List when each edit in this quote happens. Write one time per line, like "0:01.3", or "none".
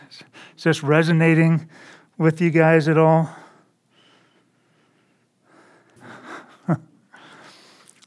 0:06.0